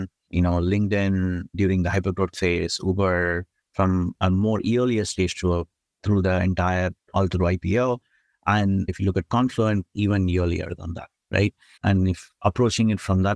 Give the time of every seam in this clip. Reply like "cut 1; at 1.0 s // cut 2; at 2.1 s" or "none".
cut 1; at 11.8 s